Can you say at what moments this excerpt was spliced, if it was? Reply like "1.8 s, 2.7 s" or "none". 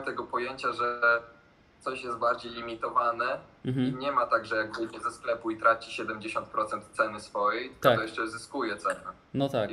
none